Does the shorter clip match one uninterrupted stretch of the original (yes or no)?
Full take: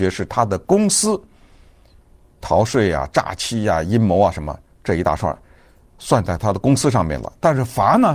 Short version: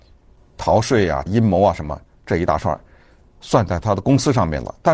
no